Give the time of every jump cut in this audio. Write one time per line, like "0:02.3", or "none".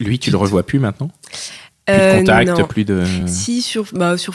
none